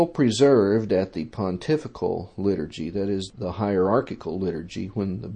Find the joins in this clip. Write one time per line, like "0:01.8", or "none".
none